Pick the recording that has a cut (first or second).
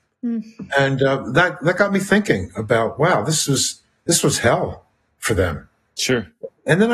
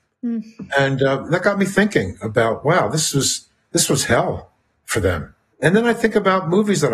second